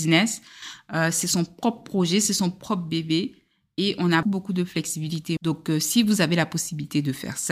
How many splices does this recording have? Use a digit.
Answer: 2